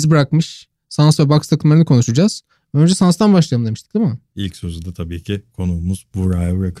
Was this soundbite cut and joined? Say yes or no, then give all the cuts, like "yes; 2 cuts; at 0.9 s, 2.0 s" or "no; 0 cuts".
no; 0 cuts